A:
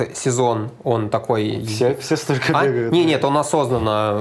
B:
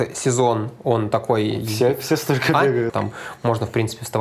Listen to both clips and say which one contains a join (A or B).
B